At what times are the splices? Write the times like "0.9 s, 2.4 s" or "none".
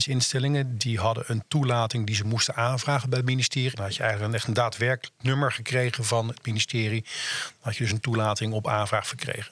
3.7 s